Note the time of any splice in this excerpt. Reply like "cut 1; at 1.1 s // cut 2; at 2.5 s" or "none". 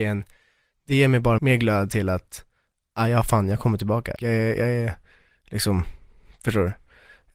cut 1; at 1.4 s // cut 2; at 4.2 s